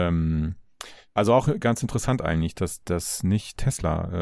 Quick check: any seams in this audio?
yes; 1 cut; at 1.1 s

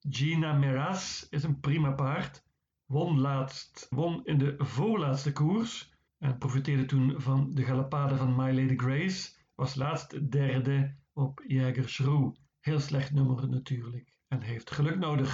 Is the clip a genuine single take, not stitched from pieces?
no; 1 cut; at 3.9 s

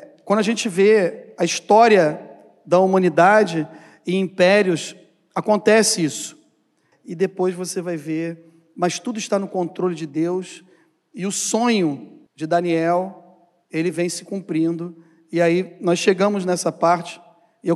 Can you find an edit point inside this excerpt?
yes; 2 cuts; at 6.9 s, 12.3 s

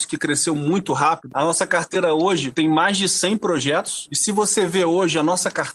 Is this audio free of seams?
no; 2 cuts; at 1.3 s, 4.1 s

